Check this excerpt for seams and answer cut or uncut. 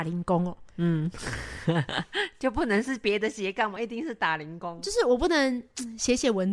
uncut